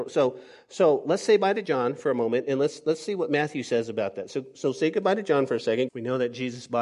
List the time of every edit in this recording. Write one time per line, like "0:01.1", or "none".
0:05.9

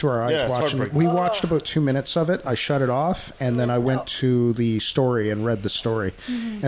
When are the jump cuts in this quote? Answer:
none

